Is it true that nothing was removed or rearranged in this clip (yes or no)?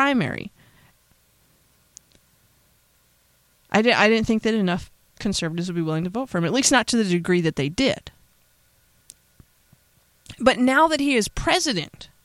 yes